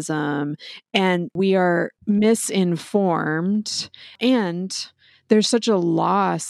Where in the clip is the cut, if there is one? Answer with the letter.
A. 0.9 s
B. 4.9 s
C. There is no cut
C